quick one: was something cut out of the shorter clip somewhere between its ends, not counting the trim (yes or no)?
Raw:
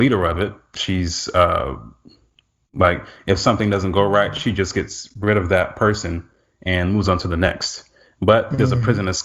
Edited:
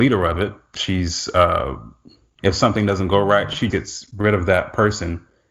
yes